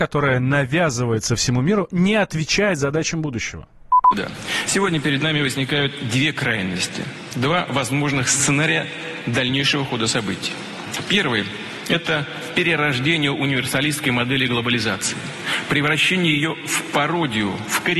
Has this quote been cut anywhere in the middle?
no; 0 cuts

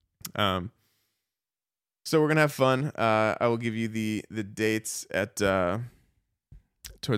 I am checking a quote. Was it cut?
no; 0 cuts

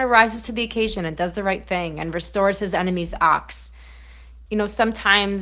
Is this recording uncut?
no; 1 cut; at 4.5 s

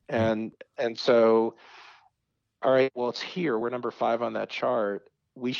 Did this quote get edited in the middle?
no; 0 cuts

